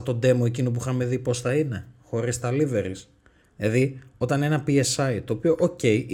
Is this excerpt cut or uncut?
cut